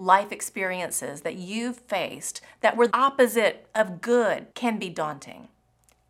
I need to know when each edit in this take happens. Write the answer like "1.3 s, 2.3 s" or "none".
2.9 s, 4.5 s